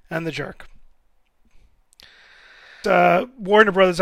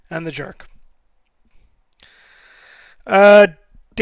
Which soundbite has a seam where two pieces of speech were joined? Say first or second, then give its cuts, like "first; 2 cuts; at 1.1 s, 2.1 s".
first; 1 cut; at 2.8 s